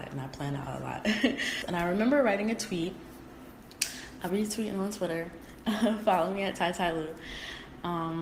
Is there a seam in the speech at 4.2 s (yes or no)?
no